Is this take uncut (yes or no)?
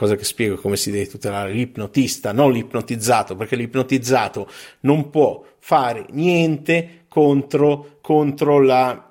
no